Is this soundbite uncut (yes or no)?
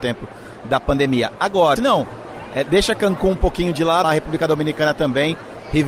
no